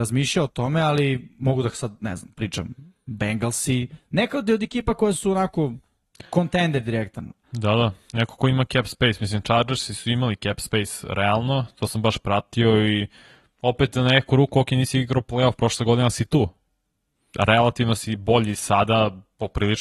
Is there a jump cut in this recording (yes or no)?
no